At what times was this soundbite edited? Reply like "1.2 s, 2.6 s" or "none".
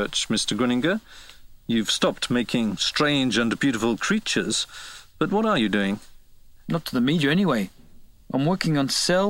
6.6 s

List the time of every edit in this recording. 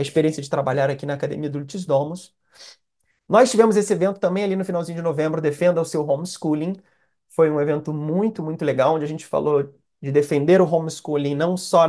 8.4 s

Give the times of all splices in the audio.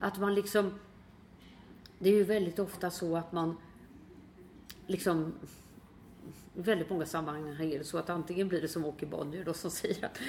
none

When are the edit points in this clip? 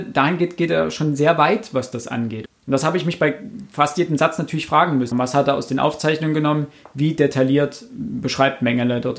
2.5 s, 5.1 s

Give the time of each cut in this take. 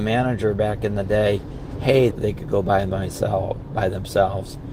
2.1 s

